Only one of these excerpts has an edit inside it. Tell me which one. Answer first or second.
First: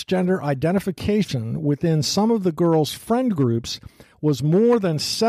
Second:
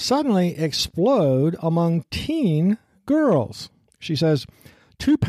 second